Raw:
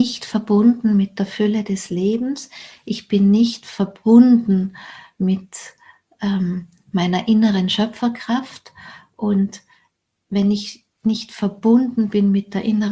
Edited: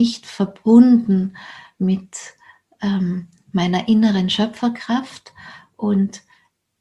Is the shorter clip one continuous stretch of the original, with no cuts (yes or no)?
yes